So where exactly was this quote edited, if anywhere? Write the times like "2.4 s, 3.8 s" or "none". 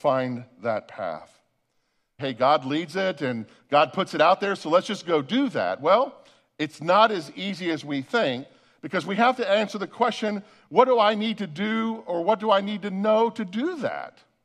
2.2 s